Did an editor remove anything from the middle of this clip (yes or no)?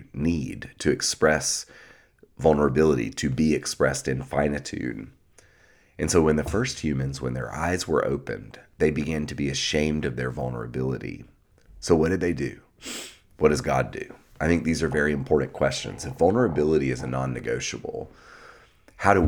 no